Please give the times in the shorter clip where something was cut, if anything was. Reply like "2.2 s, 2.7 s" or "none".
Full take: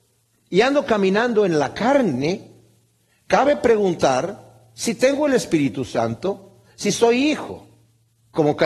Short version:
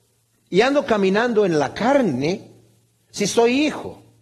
3.1 s